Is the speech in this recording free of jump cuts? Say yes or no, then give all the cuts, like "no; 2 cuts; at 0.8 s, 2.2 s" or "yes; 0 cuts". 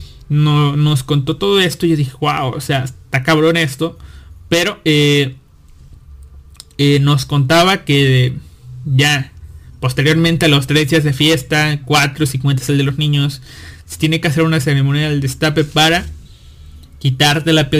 yes; 0 cuts